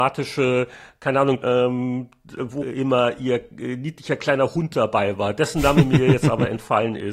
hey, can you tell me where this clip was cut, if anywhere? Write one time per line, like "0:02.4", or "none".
0:01.4
0:02.6

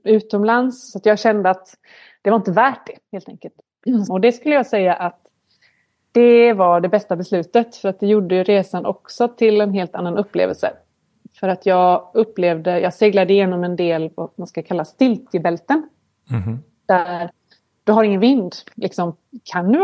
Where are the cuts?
0:04.1

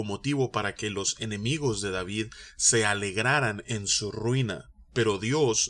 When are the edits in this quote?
none

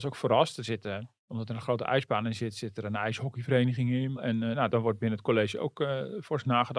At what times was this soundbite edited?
0:01.2
0:04.2

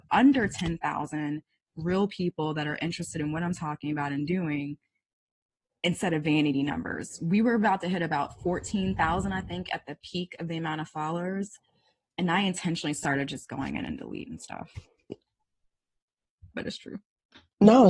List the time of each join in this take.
0:15.1
0:16.5

